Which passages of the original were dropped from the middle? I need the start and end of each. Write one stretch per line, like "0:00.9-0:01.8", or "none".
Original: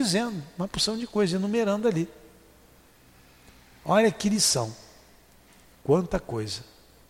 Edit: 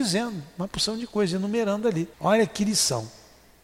0:02.1-0:03.8